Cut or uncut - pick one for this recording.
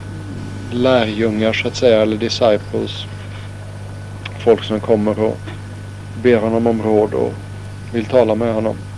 uncut